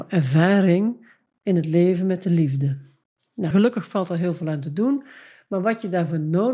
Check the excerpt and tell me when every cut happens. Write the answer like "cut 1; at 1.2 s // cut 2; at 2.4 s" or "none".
cut 1; at 3.5 s

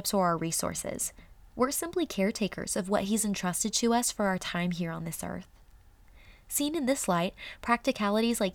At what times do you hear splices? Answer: cut 1; at 1.5 s

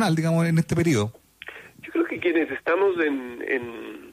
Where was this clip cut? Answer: none

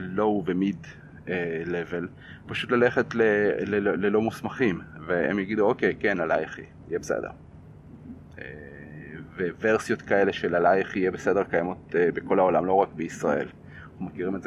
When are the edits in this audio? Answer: none

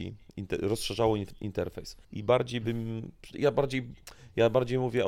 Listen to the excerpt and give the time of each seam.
cut 1; at 2.0 s // cut 2; at 3.3 s

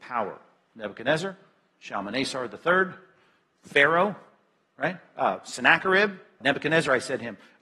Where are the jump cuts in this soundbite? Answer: cut 1; at 6.4 s

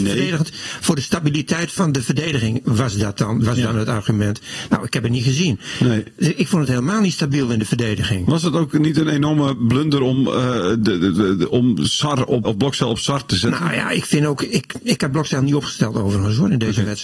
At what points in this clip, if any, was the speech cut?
cut 1; at 12.4 s

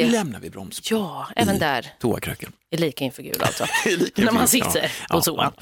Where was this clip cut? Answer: none

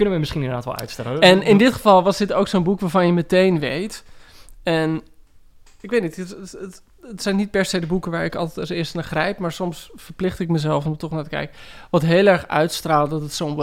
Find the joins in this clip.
none

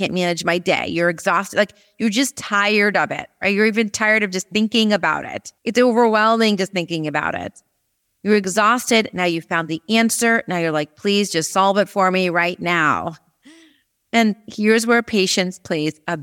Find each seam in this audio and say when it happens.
cut 1; at 5.6 s

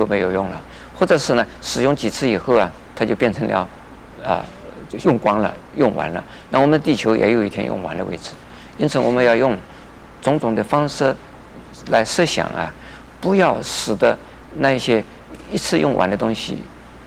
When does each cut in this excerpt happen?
cut 1; at 5.0 s

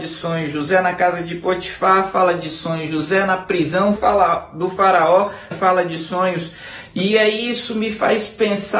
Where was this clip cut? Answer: cut 1; at 4.0 s // cut 2; at 5.5 s

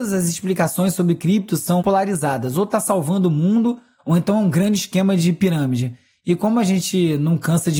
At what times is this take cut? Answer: cut 1; at 1.8 s

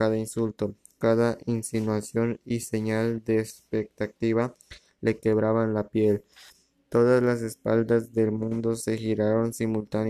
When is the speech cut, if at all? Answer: cut 1; at 0.9 s

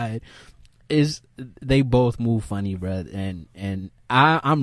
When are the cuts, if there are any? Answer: none

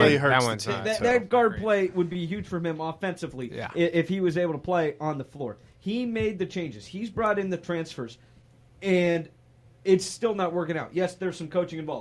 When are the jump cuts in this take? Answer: none

